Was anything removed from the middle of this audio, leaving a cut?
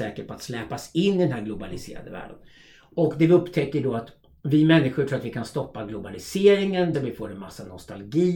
yes; 1 cut; at 6.9 s

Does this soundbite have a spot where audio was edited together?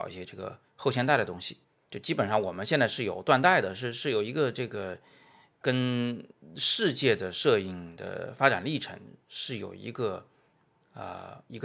no; 0 cuts

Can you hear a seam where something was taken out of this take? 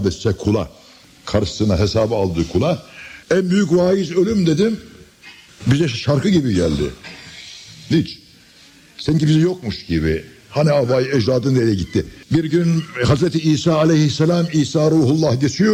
yes; 1 cut; at 3.2 s

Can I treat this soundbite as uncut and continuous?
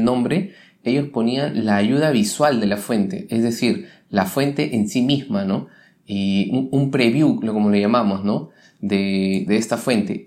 yes; 0 cuts

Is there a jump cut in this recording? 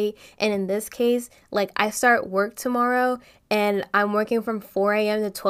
no; 0 cuts

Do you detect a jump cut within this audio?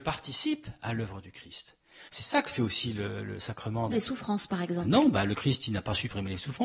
yes; 2 cuts; at 2.1 s, 3.9 s

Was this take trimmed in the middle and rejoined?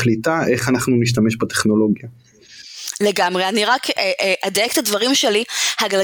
no; 0 cuts

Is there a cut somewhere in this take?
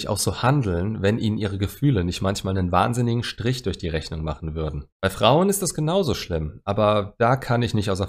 yes; 1 cut; at 4.9 s

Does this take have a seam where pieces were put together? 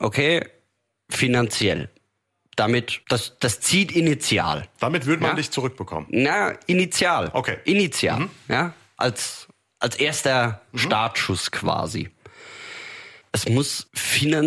yes; 1 cut; at 13.2 s

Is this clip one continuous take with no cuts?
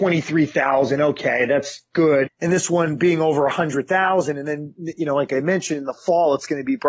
no; 1 cut; at 2.3 s

